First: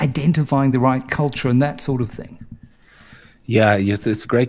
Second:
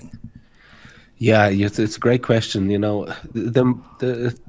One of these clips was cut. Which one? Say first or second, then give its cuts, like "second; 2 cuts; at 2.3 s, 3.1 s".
second; 1 cut; at 3.3 s